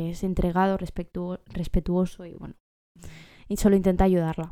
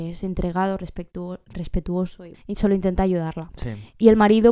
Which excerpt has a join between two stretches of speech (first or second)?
second